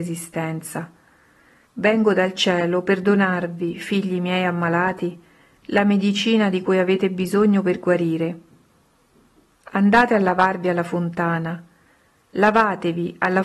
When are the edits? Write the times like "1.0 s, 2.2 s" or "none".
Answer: 1.7 s